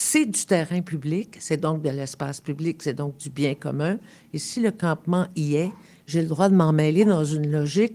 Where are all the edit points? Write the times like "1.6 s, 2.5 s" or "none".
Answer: none